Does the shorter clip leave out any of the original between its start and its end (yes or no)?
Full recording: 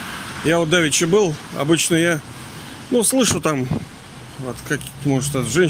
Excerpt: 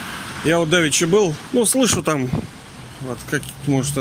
yes